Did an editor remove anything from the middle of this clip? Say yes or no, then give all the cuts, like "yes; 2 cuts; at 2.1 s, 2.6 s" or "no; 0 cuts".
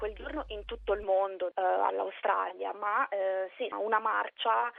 yes; 2 cuts; at 1.5 s, 3.7 s